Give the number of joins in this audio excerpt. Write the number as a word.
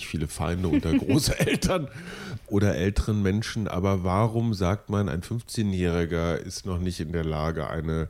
one